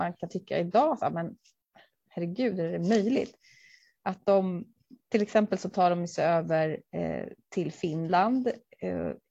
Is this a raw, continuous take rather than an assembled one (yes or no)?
yes